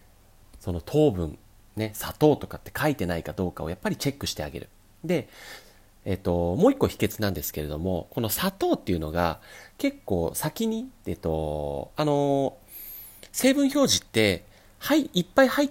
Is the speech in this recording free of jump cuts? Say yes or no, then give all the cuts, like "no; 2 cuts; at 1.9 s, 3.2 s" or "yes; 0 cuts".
yes; 0 cuts